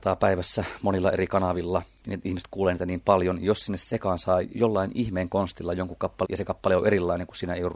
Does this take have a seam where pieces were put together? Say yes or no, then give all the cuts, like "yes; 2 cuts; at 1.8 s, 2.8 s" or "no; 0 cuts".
yes; 1 cut; at 6.2 s